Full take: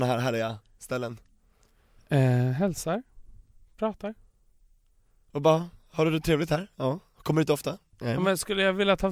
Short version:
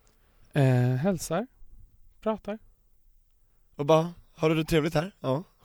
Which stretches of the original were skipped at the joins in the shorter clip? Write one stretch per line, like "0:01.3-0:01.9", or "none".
none